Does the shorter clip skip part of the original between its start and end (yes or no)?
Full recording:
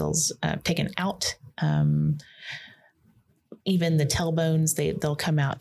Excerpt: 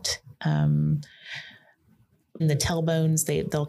yes